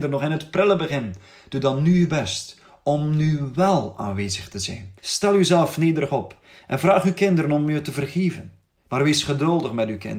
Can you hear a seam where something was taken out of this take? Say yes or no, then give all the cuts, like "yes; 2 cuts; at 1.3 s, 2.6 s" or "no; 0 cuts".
yes; 2 cuts; at 5.0 s, 8.8 s